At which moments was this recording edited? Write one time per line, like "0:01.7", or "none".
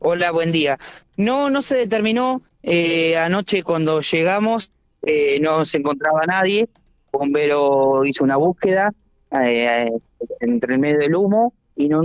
none